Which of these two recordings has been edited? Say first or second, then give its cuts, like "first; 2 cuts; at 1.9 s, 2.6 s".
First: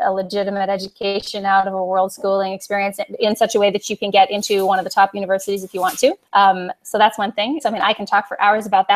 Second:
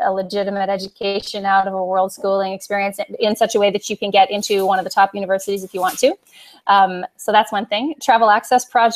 first; 2 cuts; at 6.2 s, 7.6 s